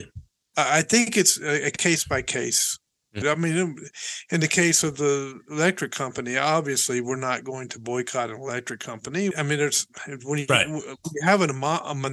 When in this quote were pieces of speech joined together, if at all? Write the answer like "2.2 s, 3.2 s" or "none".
3.2 s, 9.3 s